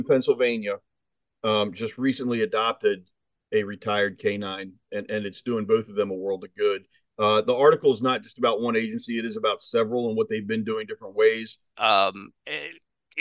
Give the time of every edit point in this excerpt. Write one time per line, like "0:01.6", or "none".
0:11.7